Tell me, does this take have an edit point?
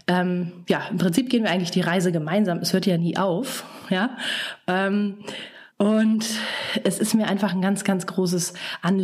yes; 1 cut; at 5.7 s

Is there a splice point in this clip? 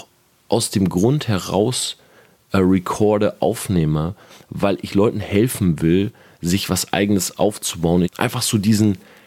yes; 1 cut; at 8.0 s

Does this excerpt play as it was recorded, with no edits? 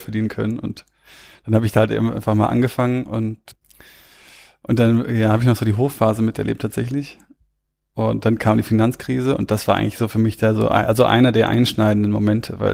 yes; 0 cuts

